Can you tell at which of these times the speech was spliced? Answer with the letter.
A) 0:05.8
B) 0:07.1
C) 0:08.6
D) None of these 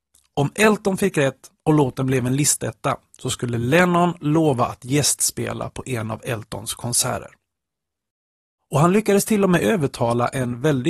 C